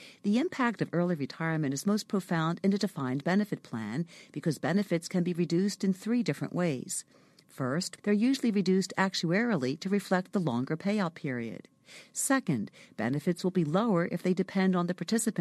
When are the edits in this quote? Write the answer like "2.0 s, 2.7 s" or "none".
8.0 s